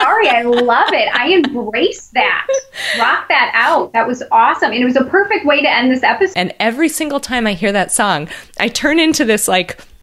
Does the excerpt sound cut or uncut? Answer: cut